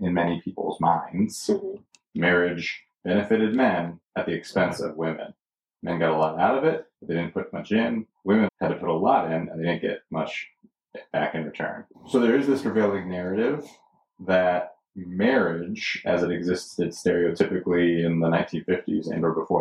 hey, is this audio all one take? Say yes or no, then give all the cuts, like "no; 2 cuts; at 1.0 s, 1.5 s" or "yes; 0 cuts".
no; 2 cuts; at 8.5 s, 11.9 s